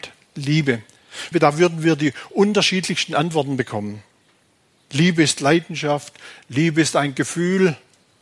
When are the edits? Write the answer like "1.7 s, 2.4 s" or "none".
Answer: 1.3 s